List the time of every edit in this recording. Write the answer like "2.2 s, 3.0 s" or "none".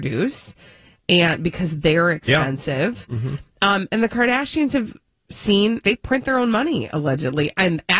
3.9 s, 5.8 s